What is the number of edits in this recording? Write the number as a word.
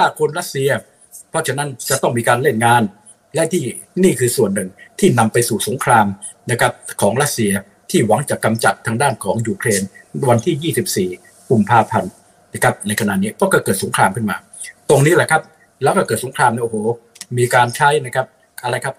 zero